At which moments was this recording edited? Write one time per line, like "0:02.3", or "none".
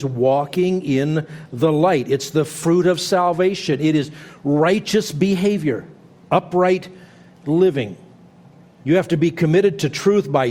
none